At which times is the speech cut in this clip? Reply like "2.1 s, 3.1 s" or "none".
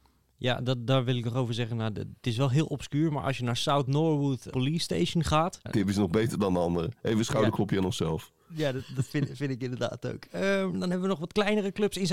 4.5 s, 5.6 s